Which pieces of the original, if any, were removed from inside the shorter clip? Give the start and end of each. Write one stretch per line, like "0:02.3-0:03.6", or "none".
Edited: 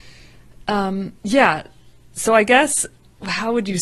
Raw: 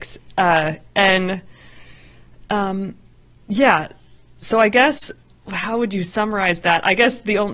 0:03.0-0:03.4